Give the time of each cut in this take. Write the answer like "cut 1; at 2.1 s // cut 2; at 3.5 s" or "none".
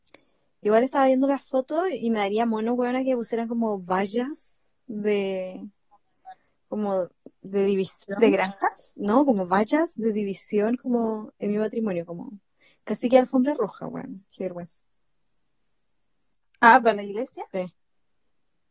none